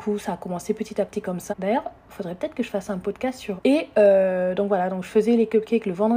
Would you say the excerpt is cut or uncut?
cut